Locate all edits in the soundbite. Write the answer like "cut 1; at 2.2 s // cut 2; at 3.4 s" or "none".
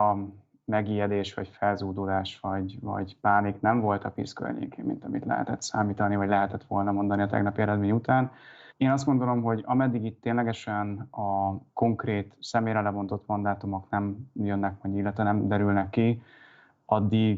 cut 1; at 8.7 s